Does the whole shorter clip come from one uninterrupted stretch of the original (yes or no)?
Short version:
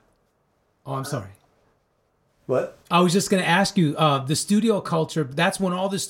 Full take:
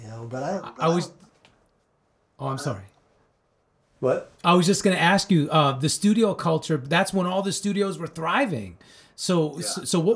yes